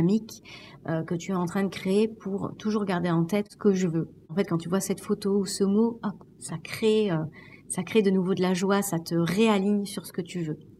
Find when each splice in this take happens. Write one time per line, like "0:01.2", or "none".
none